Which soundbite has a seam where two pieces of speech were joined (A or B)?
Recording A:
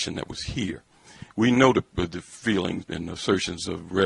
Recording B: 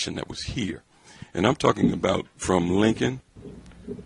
A